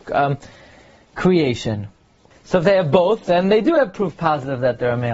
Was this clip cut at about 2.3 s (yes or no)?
yes